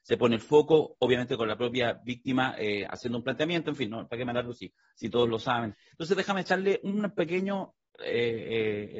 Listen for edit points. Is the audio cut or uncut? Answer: cut